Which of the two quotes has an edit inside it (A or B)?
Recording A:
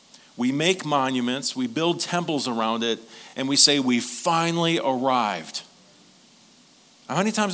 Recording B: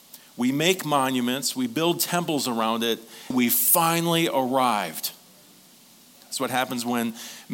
B